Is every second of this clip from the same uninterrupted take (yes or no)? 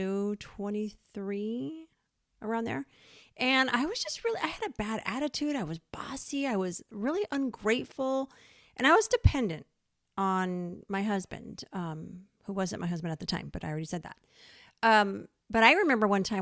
yes